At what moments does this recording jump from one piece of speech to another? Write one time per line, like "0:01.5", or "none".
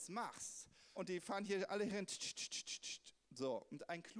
0:01.0